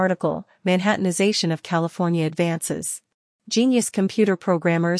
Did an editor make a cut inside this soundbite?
yes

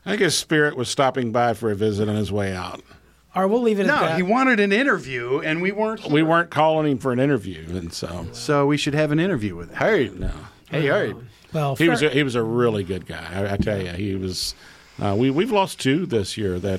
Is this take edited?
no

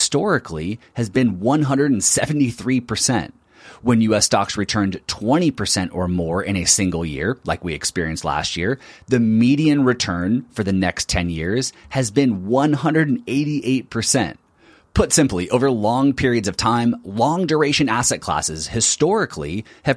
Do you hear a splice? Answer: no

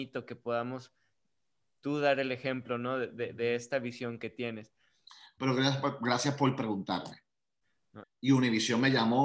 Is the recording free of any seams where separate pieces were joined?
no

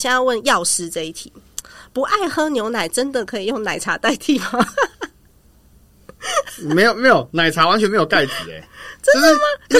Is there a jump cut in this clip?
no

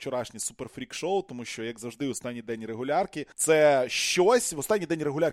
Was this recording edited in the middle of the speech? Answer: yes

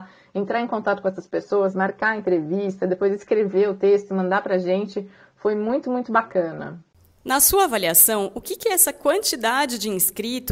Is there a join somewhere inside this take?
no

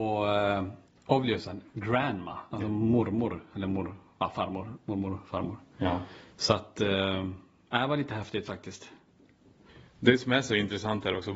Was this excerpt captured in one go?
yes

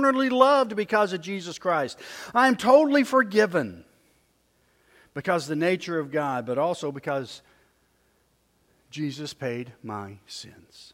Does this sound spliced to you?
no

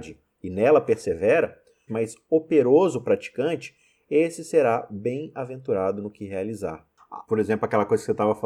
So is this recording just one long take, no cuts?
no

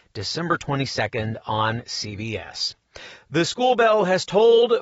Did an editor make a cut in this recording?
no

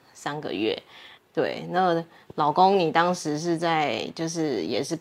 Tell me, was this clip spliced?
yes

